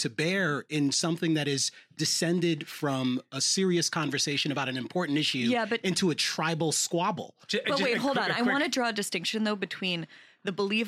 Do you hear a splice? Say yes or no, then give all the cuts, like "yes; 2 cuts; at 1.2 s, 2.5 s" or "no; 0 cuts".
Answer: no; 0 cuts